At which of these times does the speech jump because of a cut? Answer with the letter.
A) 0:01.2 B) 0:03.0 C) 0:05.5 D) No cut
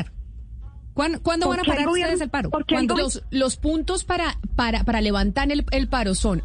B